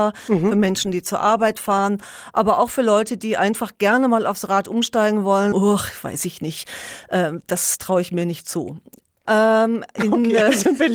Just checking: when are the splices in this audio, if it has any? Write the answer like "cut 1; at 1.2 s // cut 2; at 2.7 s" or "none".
cut 1; at 5.5 s // cut 2; at 9.2 s